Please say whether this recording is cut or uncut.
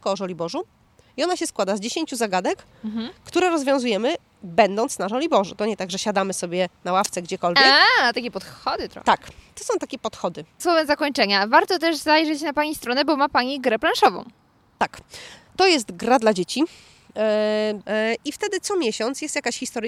cut